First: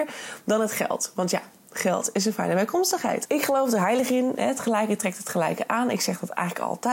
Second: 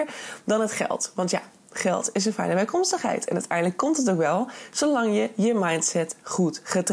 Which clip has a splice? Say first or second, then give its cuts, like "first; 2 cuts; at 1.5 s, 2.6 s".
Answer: first; 1 cut; at 3.3 s